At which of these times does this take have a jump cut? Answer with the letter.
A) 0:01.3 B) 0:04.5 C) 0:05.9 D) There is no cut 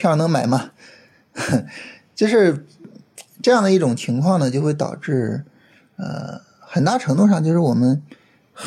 D